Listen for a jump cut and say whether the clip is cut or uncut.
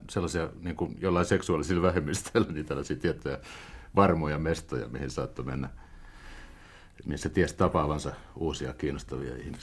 uncut